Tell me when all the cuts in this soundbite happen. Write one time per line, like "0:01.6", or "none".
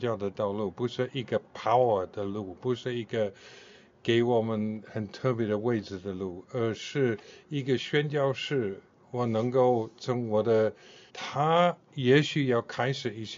0:11.1